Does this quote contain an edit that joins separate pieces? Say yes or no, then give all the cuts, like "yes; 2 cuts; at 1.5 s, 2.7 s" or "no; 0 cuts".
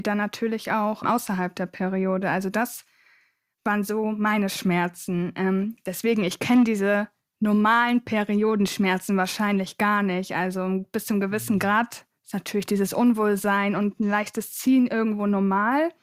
yes; 1 cut; at 1.0 s